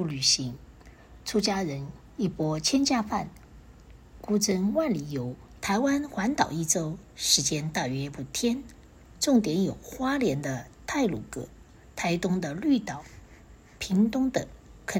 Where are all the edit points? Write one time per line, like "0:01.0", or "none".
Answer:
0:05.6